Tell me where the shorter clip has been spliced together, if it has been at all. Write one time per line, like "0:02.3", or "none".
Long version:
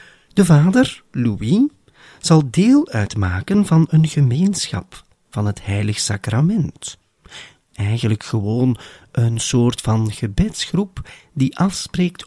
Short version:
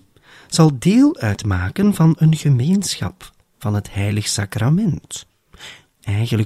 none